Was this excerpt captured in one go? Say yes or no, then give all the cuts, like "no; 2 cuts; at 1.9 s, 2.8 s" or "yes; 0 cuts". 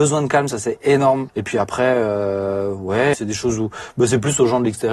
no; 2 cuts; at 1.3 s, 3.1 s